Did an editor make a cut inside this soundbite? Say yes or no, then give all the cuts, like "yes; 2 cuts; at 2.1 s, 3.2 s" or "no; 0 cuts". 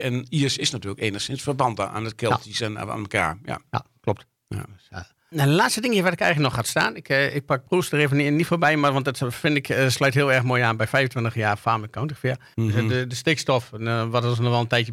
yes; 1 cut; at 12.5 s